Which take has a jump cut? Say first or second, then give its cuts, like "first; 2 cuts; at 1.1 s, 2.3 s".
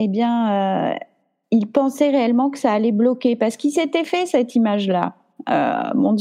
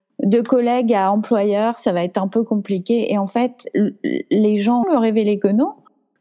second; 1 cut; at 4.8 s